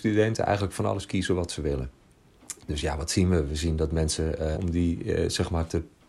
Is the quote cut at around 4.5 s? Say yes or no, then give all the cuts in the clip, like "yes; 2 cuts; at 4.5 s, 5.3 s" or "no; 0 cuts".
yes; 1 cut; at 4.5 s